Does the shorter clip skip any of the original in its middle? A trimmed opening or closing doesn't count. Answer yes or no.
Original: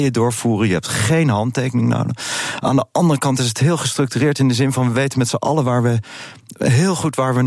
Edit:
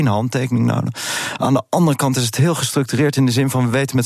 no